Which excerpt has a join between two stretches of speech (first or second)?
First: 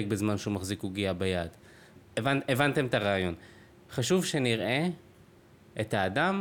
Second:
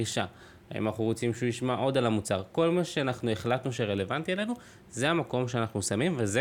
first